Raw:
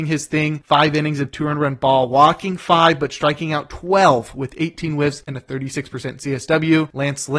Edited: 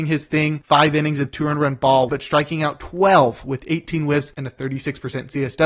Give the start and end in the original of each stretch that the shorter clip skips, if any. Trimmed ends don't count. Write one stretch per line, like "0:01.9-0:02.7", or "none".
0:02.1-0:03.0